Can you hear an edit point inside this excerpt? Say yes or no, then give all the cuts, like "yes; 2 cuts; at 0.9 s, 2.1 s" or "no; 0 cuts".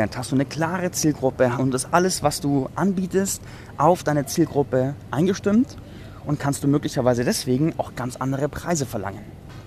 yes; 1 cut; at 1.6 s